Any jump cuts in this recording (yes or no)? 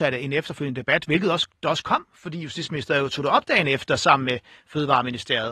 no